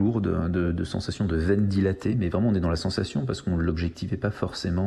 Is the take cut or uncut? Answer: uncut